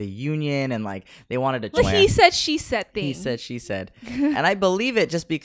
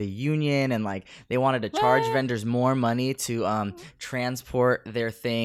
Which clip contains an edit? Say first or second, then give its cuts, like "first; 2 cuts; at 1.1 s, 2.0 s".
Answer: first; 2 cuts; at 1.8 s, 4.3 s